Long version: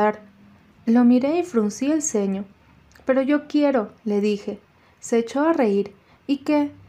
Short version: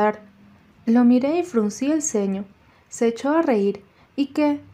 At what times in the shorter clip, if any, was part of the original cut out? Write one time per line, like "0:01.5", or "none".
0:02.7